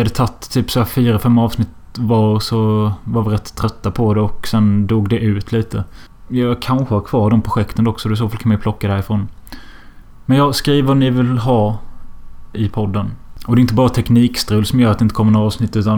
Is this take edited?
yes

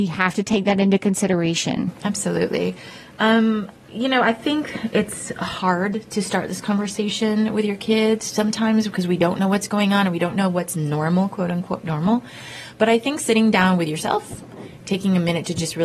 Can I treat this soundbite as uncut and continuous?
yes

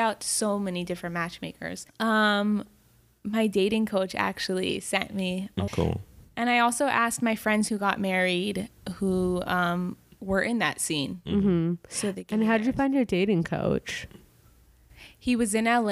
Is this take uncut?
no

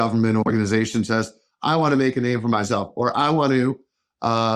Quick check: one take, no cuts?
yes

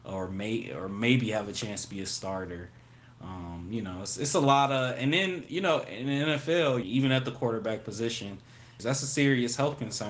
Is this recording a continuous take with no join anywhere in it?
no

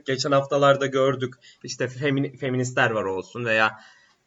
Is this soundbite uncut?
no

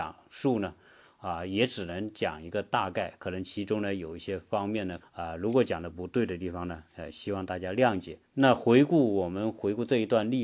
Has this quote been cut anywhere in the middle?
yes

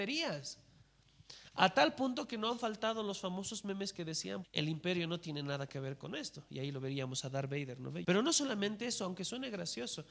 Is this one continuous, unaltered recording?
no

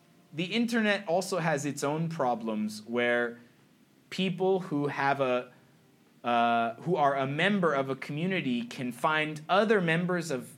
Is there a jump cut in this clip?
no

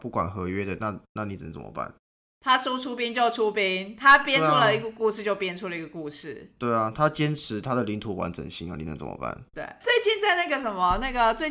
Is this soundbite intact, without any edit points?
no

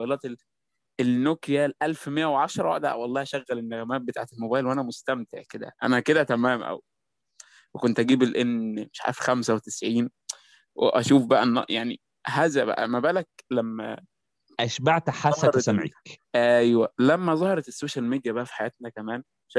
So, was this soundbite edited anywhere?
yes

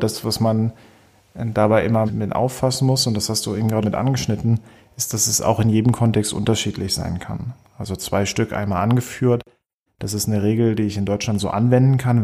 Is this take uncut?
no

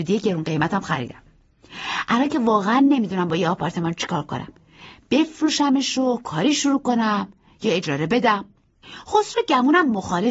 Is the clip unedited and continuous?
yes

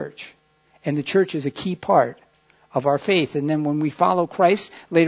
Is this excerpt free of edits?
yes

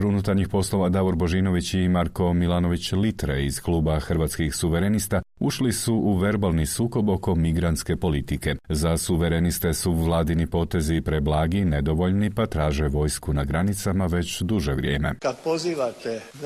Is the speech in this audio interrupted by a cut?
no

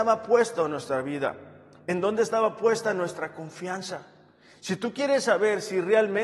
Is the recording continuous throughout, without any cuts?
yes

